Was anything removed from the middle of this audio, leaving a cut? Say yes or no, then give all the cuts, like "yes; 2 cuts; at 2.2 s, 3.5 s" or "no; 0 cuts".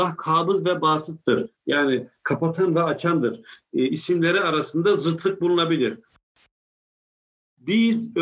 yes; 1 cut; at 3.9 s